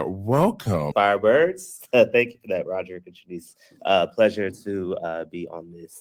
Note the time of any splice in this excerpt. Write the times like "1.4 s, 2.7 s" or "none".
0.9 s